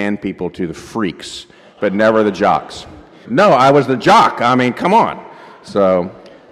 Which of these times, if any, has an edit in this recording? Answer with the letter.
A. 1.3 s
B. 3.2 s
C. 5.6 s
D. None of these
B